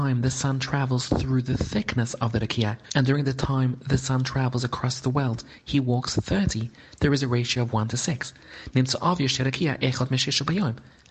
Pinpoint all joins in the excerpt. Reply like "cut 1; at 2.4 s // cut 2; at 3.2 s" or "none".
cut 1; at 2.8 s